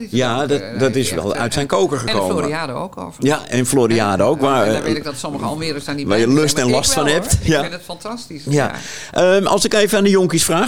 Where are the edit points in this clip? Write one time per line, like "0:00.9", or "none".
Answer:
none